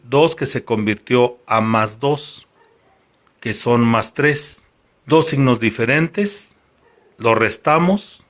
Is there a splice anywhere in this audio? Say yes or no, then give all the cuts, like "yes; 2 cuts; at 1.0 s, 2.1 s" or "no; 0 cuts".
yes; 1 cut; at 4.9 s